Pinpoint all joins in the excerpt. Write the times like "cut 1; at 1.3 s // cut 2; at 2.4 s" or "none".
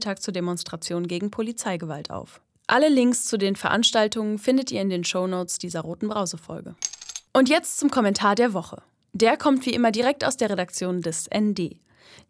none